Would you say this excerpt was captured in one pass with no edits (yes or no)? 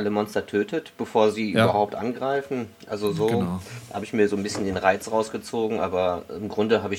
yes